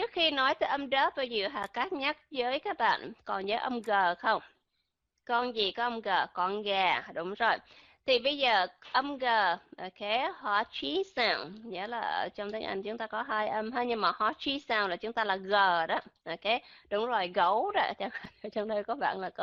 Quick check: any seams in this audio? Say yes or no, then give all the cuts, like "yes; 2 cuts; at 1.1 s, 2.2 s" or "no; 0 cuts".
no; 0 cuts